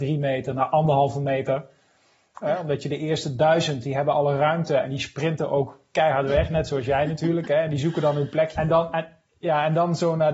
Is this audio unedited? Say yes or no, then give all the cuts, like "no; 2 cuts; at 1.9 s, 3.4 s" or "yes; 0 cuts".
no; 2 cuts; at 2.4 s, 8.6 s